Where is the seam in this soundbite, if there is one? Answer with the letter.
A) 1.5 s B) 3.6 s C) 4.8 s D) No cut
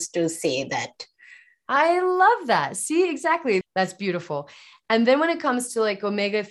B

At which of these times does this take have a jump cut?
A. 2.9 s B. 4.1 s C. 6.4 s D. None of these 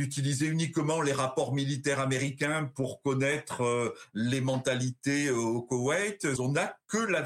C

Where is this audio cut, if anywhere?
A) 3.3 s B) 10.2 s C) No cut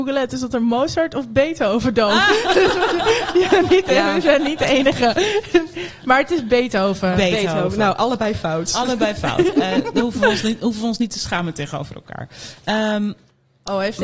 C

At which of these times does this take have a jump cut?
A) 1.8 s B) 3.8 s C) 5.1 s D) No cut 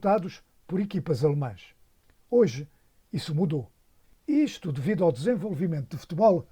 D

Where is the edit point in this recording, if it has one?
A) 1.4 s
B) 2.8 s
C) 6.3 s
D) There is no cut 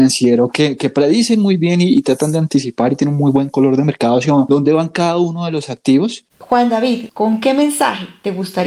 C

